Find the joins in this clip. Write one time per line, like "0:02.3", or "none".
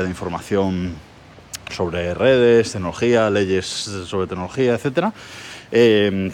none